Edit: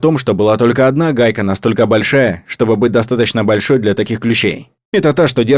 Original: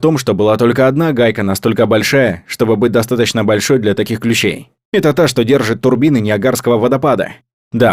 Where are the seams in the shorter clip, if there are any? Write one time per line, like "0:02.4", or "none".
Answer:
none